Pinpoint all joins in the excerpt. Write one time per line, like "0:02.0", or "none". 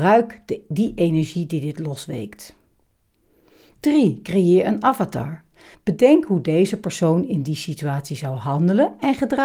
0:05.7